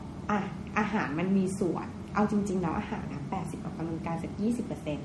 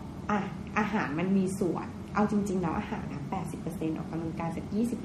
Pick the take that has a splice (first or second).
first